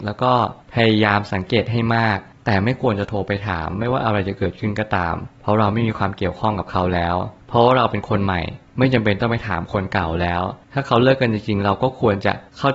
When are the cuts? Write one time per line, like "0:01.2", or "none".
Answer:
none